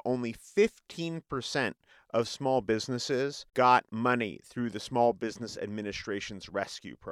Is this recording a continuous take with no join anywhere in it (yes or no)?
no